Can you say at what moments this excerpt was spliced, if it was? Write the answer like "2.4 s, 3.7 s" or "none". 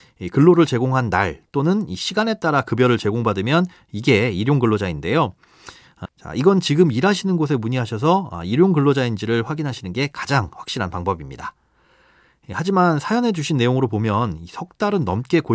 6.1 s